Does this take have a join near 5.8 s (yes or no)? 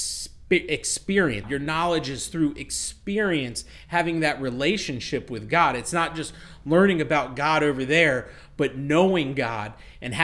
no